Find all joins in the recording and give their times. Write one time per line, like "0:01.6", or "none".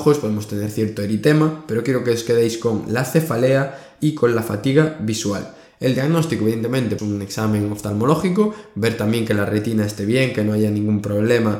0:07.0